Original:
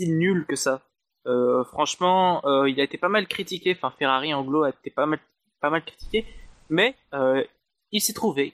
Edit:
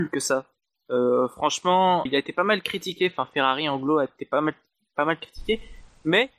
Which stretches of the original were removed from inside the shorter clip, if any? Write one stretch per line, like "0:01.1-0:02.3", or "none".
0:02.4-0:02.7

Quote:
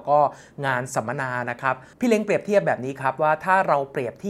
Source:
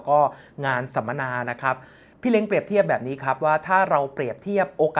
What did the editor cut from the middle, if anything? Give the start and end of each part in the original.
0:01.9-0:02.2

